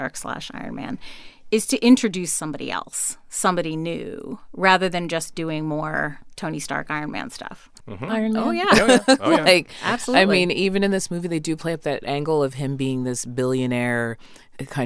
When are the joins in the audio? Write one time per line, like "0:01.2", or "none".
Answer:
0:07.8